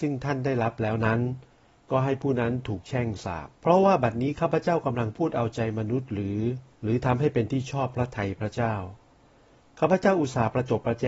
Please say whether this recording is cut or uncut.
cut